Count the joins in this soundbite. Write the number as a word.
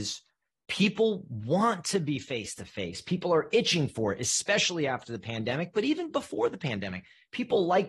zero